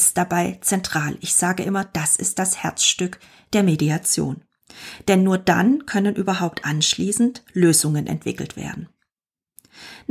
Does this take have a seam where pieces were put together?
no; 0 cuts

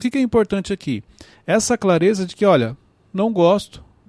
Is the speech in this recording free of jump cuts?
yes; 0 cuts

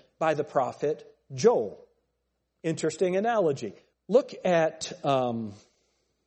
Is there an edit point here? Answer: yes; 1 cut; at 3.9 s

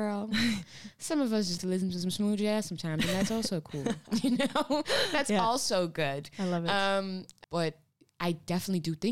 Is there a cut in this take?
yes; 2 cuts; at 1.6 s, 7.4 s

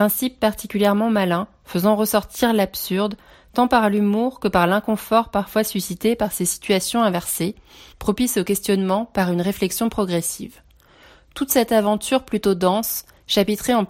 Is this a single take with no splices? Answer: yes; 0 cuts

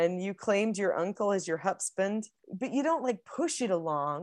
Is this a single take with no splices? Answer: no; 1 cut; at 2.4 s

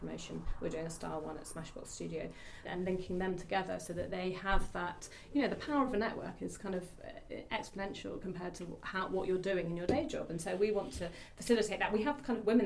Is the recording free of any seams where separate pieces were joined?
no; 1 cut; at 2.6 s

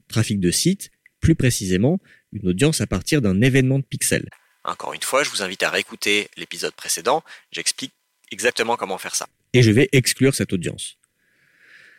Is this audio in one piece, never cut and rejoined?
yes; 0 cuts

